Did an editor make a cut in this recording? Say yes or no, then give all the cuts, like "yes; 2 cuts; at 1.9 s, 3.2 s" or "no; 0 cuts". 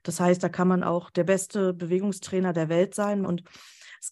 yes; 1 cut; at 3.2 s